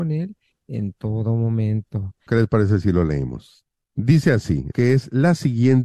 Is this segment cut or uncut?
cut